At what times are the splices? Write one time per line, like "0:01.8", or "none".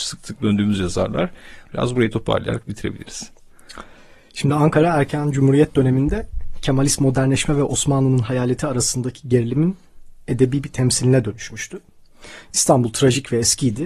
0:01.6